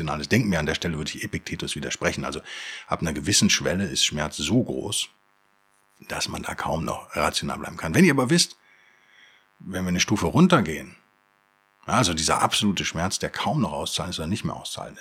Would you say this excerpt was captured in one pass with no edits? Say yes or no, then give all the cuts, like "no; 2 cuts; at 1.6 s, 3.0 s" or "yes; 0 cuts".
yes; 0 cuts